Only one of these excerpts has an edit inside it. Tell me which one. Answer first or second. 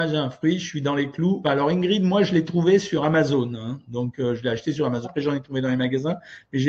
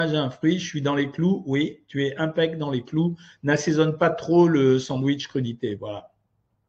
first